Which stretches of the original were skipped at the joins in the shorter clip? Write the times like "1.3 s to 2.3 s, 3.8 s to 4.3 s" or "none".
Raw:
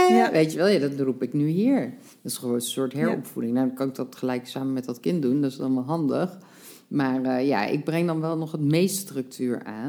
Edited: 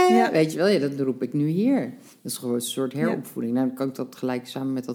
none